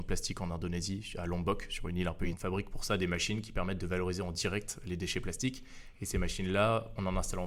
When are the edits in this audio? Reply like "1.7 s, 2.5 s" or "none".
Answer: 2.3 s